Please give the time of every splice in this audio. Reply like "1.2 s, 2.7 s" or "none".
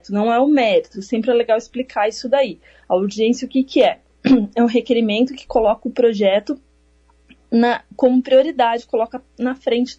none